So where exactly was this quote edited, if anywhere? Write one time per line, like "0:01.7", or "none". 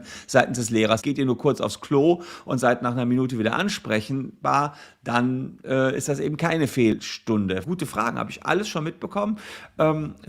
0:01.0
0:07.6

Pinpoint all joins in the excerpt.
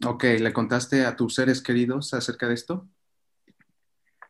none

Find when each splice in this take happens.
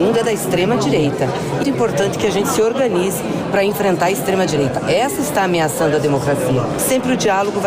0:01.6

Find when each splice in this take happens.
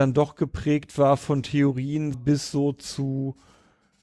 0:02.1

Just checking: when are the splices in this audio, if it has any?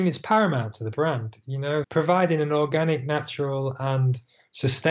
0:01.8

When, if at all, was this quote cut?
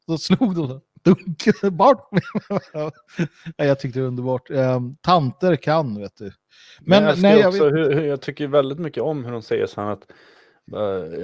none

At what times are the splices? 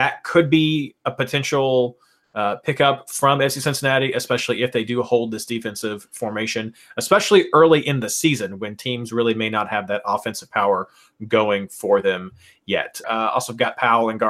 0:13.0

